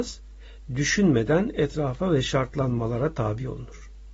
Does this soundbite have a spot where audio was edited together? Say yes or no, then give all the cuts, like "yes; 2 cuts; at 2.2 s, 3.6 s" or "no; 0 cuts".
no; 0 cuts